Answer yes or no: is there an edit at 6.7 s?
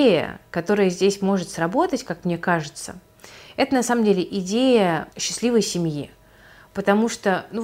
no